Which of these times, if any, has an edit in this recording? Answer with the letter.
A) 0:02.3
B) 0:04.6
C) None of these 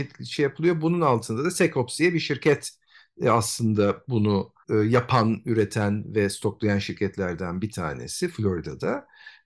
B